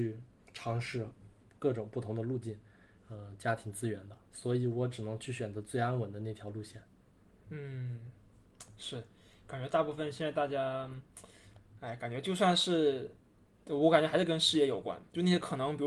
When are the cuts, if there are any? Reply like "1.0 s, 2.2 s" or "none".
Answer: 3.0 s